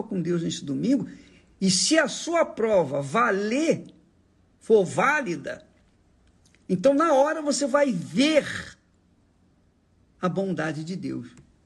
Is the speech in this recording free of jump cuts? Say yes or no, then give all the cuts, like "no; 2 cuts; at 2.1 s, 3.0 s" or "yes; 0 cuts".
yes; 0 cuts